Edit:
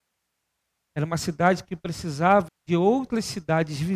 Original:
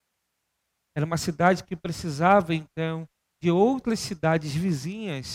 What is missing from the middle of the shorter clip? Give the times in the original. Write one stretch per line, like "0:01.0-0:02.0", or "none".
0:02.5-0:03.2

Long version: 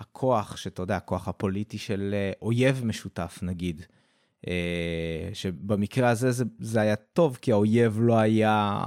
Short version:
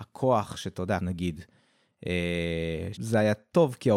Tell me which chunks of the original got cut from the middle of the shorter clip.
0:01.0-0:03.4
0:05.3-0:06.5

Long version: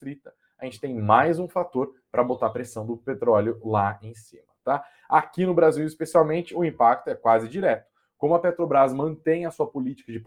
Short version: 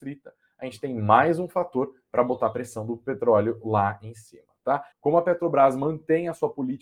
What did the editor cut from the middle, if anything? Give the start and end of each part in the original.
0:04.9-0:08.1

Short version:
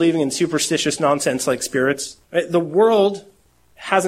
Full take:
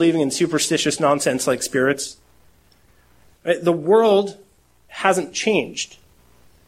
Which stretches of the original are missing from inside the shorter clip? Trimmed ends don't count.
0:02.2-0:03.4

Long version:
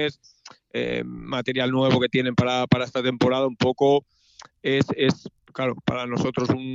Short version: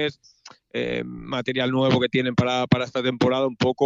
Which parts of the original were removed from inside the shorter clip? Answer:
none

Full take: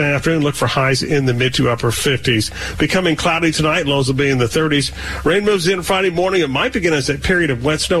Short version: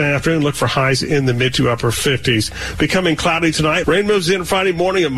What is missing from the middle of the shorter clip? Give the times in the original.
0:03.8-0:05.2

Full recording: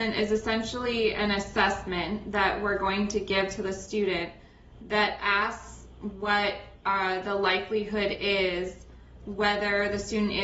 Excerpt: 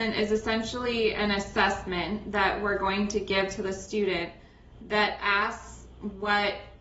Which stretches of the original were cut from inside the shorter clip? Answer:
none

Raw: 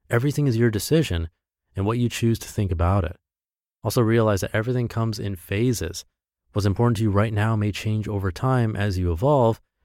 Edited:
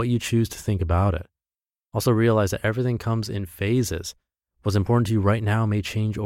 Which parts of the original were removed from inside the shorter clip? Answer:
none

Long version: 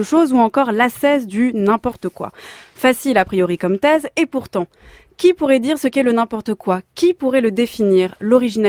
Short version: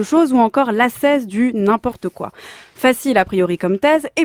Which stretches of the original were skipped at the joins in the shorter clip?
none

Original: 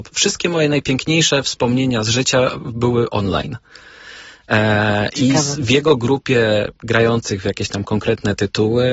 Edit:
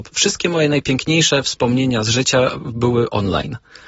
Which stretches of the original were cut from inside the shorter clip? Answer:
none

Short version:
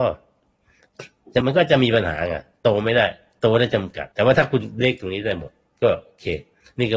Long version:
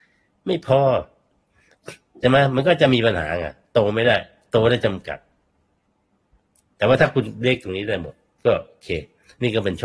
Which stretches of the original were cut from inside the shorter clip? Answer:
0:02.3-0:02.5
0:05.2-0:06.7

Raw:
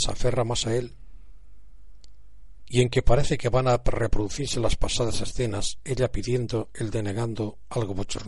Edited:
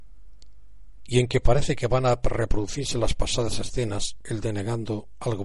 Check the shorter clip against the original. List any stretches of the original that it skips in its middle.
0:05.8-0:06.7

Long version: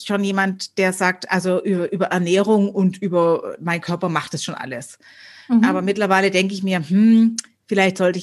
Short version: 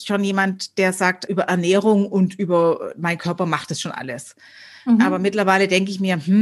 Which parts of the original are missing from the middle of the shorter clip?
0:01.3-0:01.9

